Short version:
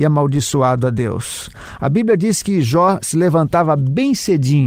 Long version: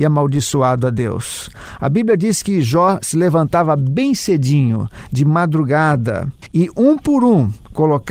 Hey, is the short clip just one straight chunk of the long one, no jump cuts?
yes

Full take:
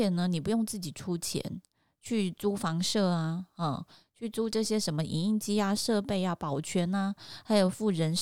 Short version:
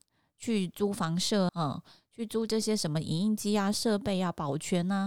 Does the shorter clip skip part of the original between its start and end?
yes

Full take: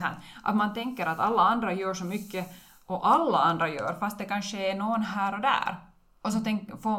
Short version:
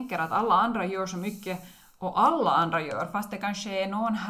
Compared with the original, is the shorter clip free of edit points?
yes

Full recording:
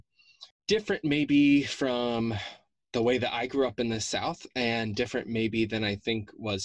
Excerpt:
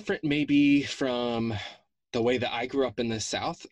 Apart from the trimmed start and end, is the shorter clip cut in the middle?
no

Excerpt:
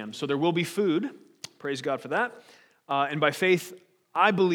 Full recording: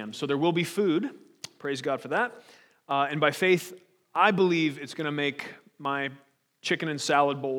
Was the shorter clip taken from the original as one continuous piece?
yes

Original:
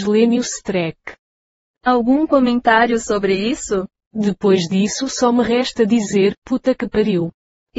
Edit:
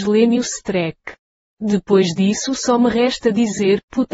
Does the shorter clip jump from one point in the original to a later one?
yes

